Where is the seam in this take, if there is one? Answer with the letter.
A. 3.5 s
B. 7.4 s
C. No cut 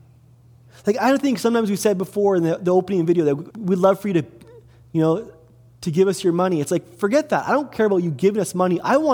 A